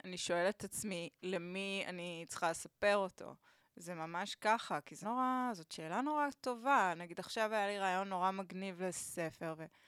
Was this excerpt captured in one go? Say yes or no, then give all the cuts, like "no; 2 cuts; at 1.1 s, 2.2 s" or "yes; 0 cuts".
no; 1 cut; at 5.0 s